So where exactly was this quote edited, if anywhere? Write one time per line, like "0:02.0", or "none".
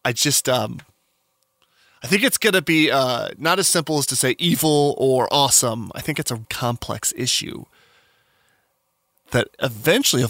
0:06.4